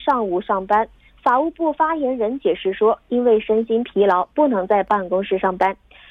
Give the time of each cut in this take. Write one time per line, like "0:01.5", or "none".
none